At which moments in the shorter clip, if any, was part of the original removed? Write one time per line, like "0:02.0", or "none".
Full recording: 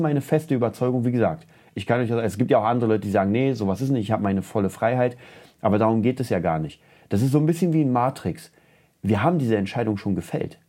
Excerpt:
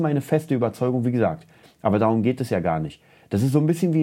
0:01.6